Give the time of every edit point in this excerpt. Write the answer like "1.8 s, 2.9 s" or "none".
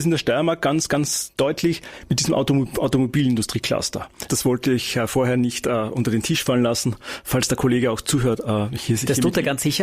4.3 s